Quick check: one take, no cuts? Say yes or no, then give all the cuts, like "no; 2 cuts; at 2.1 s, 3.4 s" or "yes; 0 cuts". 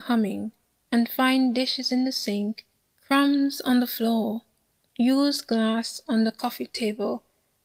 yes; 0 cuts